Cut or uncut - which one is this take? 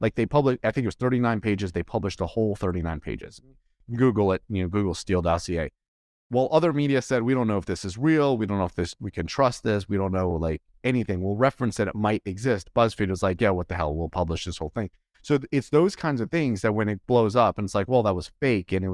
uncut